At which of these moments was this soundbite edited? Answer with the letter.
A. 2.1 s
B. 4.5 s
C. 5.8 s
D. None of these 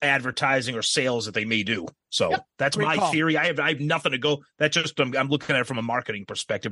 D